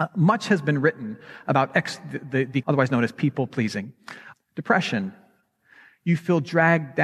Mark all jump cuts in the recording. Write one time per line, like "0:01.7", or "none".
0:02.6
0:04.3